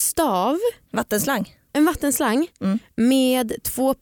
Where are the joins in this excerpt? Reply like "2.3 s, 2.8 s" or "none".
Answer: none